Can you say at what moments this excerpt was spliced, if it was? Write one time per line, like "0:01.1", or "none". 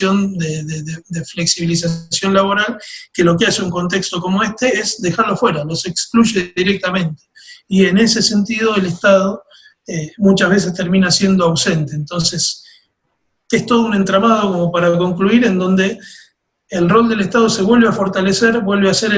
none